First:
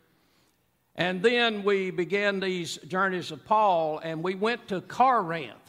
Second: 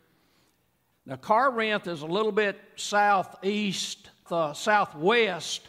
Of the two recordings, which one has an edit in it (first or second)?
second